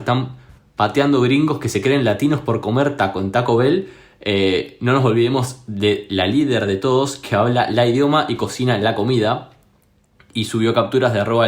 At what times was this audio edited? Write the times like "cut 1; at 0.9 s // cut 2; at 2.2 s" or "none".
none